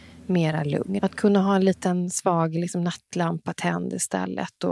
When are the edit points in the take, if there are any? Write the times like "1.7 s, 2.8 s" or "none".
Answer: 1.0 s